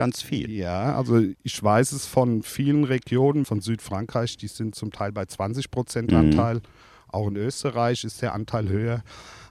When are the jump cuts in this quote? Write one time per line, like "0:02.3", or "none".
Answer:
none